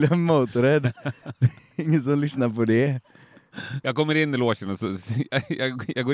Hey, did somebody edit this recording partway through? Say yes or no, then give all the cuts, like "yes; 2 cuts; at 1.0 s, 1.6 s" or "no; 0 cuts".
yes; 1 cut; at 3.8 s